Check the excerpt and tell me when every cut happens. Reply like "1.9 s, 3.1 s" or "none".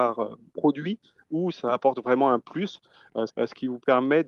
3.3 s